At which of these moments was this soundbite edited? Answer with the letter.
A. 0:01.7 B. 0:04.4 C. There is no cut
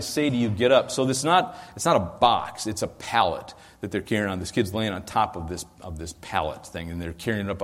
C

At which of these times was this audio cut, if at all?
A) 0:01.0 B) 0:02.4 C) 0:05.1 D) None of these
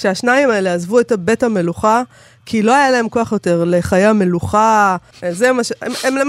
C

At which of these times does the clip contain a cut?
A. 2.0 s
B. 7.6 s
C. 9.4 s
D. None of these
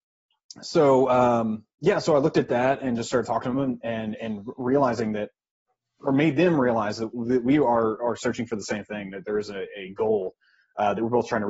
D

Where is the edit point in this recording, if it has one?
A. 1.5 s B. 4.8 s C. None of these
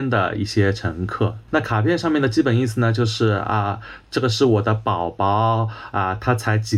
A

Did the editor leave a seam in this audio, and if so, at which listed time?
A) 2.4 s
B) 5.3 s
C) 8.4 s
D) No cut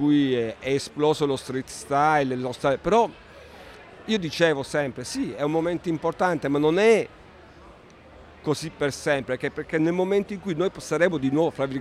D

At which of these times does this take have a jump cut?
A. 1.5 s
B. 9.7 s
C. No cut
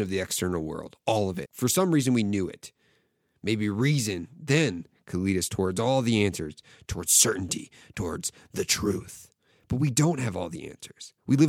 A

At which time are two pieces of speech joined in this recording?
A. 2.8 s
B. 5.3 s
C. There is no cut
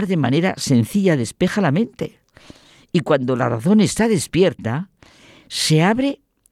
C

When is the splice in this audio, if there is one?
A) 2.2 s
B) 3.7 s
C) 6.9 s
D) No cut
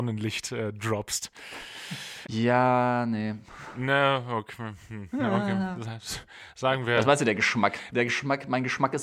A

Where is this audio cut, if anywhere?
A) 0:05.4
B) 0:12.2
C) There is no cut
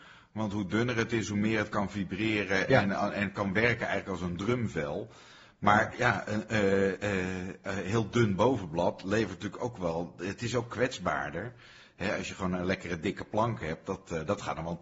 C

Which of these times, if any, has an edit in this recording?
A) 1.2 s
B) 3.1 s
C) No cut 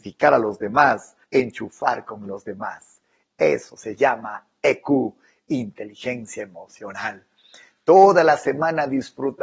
A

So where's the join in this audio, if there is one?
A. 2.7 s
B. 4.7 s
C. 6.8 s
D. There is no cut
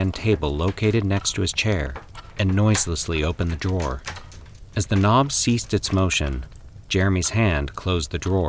B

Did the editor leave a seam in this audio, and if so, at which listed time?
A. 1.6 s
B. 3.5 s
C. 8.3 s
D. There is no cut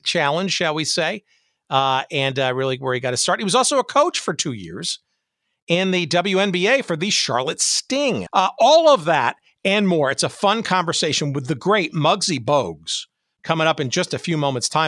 C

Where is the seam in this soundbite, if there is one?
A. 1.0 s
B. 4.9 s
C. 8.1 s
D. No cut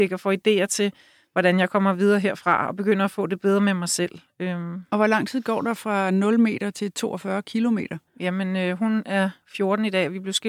C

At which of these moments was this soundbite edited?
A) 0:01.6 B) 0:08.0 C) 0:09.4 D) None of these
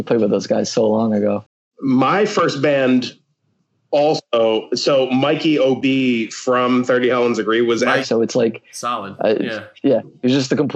B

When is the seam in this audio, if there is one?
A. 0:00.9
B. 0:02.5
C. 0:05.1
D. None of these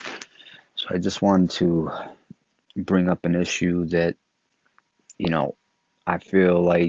C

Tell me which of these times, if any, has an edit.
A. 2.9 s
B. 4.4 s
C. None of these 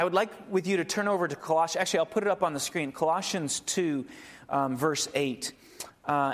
C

